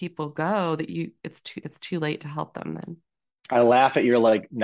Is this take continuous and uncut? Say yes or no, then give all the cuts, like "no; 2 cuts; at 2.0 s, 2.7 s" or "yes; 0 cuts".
no; 1 cut; at 1.6 s